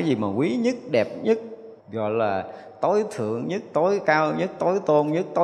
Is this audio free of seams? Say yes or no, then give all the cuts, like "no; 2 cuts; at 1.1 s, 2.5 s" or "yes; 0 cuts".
no; 1 cut; at 1.8 s